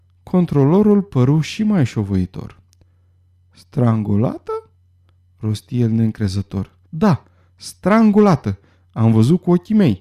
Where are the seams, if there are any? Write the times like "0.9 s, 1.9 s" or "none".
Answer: 6.8 s